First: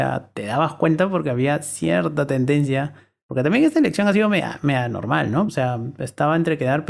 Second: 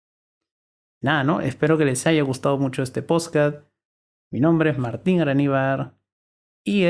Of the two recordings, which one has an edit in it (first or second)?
first